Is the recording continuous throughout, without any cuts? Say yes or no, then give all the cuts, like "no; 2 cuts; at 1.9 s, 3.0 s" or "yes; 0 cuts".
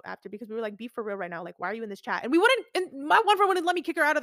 yes; 0 cuts